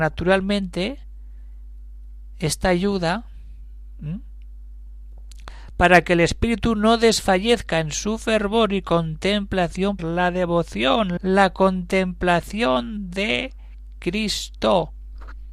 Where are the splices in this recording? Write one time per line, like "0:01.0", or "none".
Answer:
0:10.0
0:11.2